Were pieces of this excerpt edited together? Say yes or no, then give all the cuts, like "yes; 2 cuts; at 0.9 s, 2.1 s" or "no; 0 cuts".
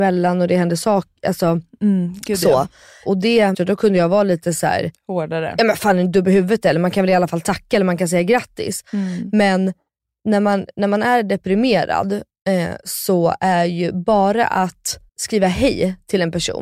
yes; 2 cuts; at 3.5 s, 15.1 s